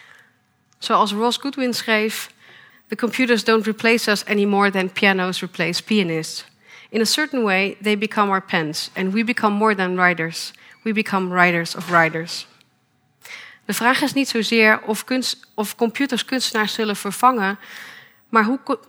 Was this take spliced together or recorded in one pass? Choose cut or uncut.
cut